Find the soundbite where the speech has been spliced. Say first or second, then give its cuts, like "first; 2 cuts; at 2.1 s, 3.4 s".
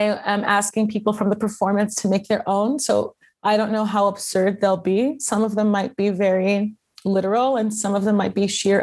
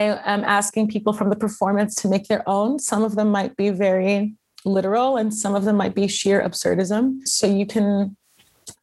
second; 2 cuts; at 2.8 s, 7.3 s